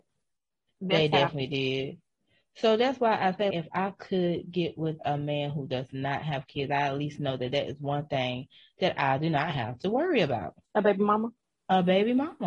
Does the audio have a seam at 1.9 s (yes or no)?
no